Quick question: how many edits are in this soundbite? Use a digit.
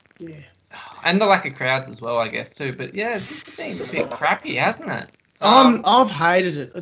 0